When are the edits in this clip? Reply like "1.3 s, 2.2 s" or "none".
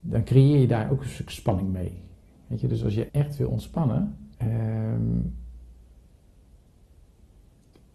3.1 s, 4.3 s